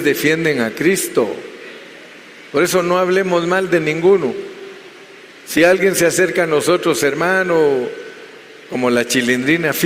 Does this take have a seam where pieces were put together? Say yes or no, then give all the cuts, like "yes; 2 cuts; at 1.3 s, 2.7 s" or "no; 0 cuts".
no; 0 cuts